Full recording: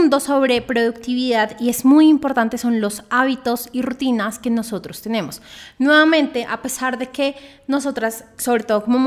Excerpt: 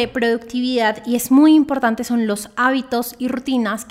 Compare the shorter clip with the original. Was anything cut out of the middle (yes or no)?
no